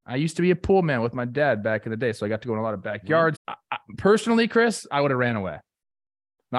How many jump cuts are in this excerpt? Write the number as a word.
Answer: one